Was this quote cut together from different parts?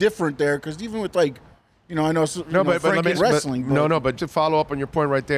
yes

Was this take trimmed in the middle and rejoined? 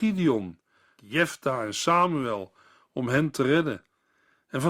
yes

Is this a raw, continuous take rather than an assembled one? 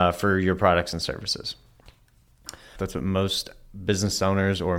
no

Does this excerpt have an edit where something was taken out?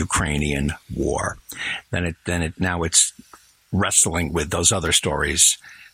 yes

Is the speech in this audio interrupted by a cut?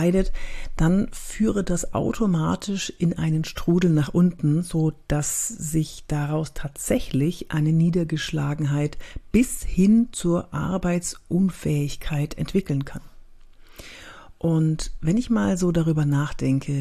no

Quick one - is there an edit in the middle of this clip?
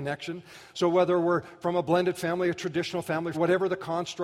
yes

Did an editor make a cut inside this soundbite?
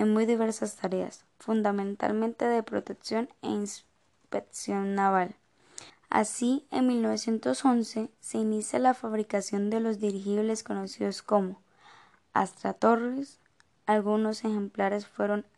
yes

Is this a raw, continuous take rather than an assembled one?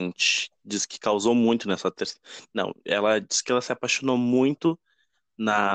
yes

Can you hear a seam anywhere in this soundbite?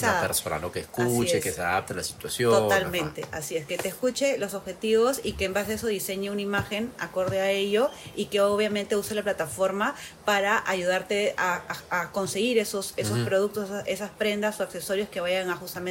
no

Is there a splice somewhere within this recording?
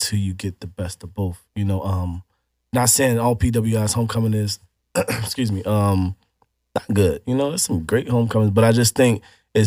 no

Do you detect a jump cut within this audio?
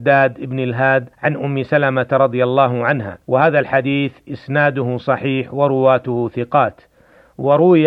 yes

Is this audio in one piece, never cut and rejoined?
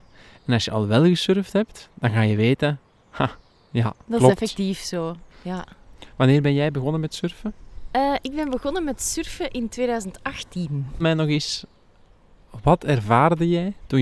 no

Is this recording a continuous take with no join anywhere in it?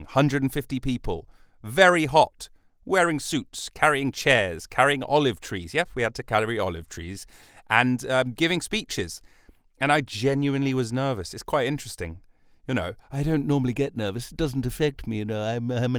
yes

